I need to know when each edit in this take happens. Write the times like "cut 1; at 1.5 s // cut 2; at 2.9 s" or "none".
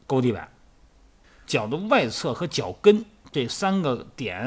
cut 1; at 1.4 s